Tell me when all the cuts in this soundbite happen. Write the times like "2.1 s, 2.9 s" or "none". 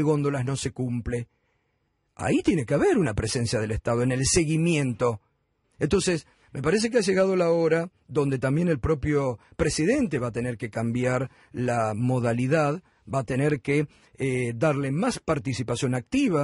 5.6 s